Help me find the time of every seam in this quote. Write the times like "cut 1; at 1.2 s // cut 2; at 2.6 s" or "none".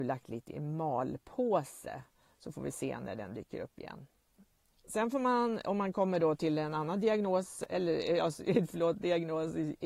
none